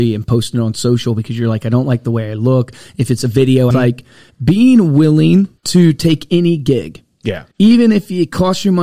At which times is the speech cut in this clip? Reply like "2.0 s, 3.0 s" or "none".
3.7 s, 5.6 s, 7.5 s